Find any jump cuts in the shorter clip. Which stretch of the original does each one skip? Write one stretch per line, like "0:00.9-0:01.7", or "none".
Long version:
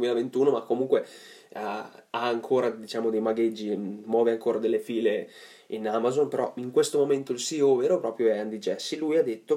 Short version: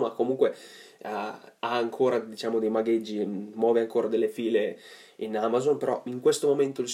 none